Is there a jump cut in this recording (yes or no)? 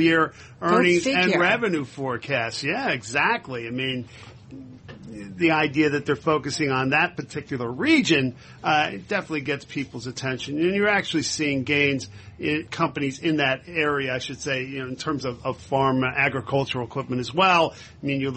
yes